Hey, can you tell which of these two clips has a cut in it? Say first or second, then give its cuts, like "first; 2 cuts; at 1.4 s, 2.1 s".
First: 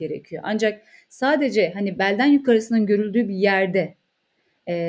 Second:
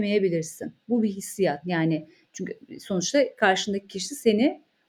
second; 1 cut; at 1.6 s